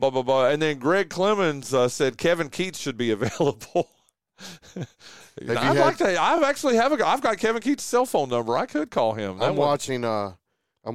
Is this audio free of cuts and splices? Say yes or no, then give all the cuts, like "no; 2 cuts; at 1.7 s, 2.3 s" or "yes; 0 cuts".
yes; 0 cuts